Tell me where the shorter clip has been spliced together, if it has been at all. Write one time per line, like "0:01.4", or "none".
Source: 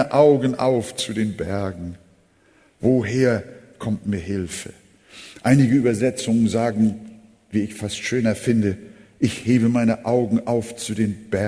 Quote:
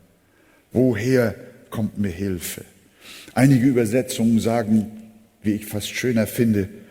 none